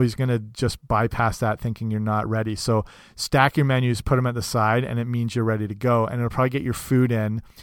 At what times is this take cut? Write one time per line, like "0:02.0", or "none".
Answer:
none